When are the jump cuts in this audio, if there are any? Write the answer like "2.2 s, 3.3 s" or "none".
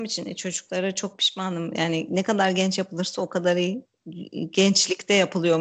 none